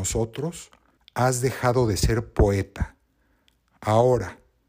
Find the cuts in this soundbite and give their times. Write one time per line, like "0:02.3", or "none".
0:01.0